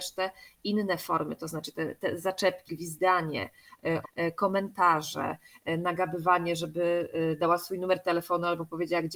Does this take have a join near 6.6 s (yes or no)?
no